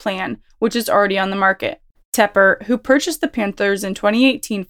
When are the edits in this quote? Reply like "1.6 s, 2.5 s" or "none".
none

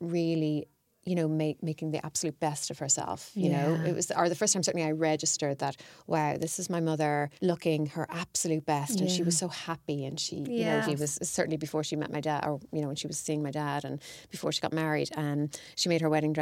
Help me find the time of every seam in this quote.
7.4 s, 10.8 s

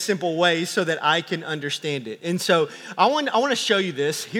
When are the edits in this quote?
none

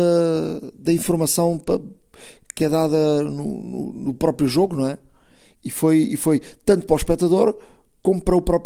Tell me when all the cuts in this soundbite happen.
none

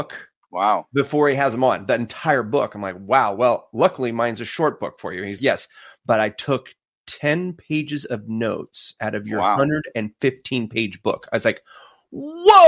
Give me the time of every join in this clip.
5.4 s

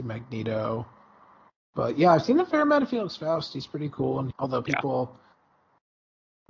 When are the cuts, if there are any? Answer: 4.3 s

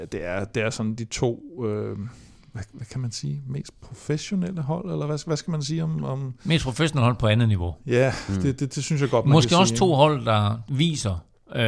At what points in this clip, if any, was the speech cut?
none

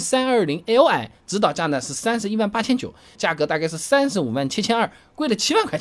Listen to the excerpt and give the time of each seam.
3.1 s

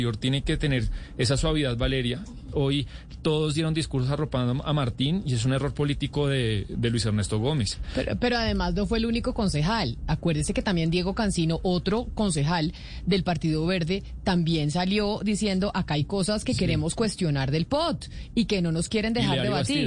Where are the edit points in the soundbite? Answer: 2.5 s

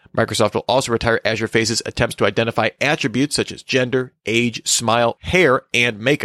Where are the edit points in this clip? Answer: 5.2 s

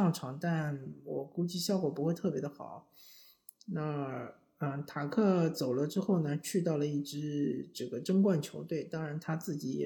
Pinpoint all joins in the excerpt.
none

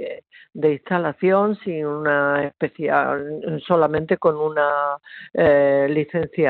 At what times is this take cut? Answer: none

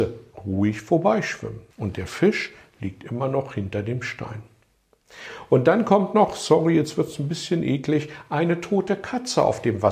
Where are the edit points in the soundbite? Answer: 1.7 s

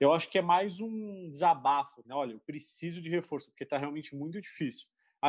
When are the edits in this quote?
2.0 s

